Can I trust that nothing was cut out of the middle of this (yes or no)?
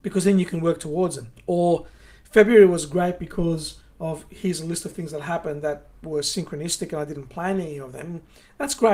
no